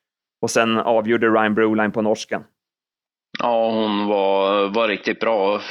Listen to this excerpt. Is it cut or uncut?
uncut